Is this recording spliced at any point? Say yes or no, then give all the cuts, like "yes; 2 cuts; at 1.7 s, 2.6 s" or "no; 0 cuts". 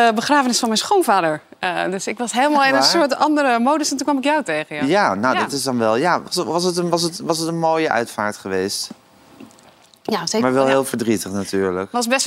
no; 0 cuts